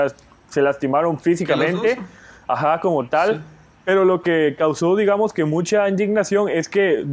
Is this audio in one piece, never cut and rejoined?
yes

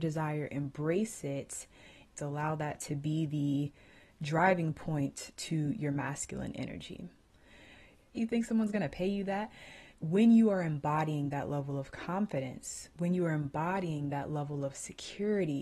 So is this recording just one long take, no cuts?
no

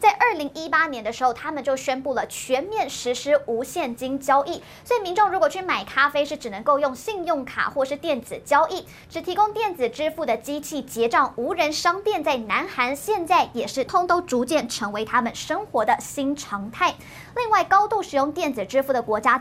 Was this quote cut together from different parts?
yes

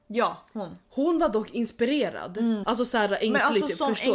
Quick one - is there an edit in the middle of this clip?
yes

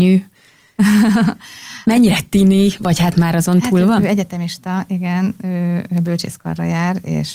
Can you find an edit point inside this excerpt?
no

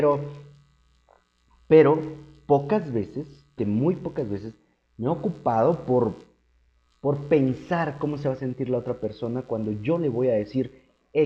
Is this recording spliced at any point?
yes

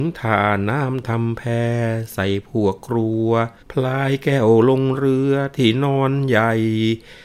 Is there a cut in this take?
yes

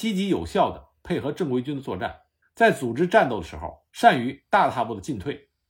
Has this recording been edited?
yes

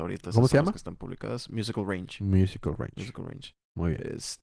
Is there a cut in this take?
no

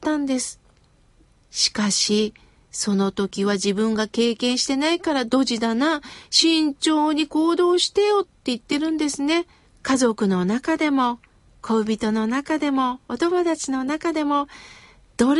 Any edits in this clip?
yes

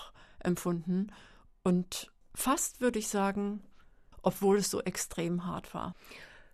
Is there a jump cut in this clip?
yes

